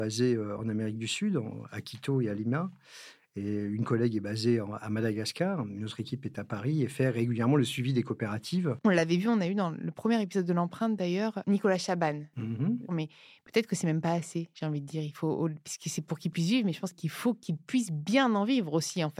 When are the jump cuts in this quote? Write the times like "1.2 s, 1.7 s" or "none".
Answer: 8.8 s, 12.9 s